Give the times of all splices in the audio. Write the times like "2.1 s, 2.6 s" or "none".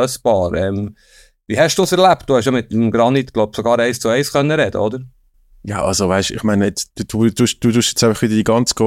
none